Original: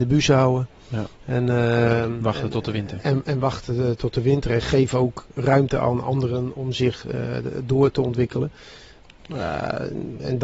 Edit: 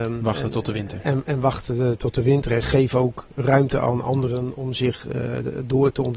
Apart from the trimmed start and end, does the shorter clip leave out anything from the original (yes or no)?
no